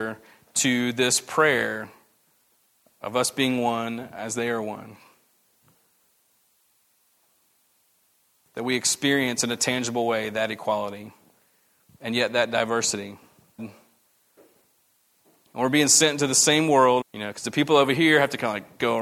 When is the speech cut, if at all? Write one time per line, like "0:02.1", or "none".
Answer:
0:13.6
0:17.0